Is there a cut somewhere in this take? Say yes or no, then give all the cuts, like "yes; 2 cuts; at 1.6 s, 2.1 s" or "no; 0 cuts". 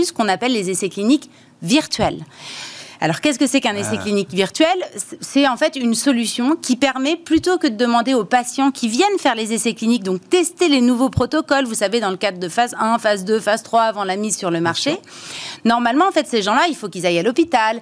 no; 0 cuts